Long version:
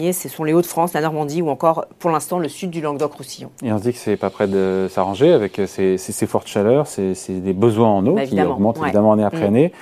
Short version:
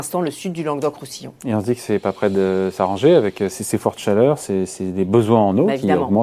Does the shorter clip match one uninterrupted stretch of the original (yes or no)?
no